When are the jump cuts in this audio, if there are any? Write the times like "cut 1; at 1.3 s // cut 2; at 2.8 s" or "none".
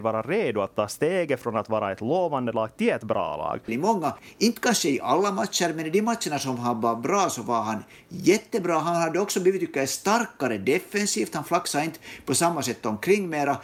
cut 1; at 3.7 s